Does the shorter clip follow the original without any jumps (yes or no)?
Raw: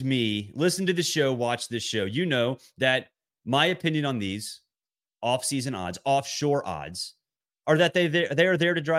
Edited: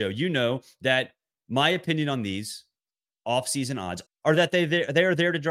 no